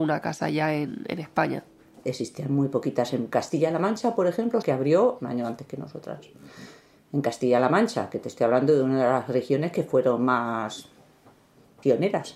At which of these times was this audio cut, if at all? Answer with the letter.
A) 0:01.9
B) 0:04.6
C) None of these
B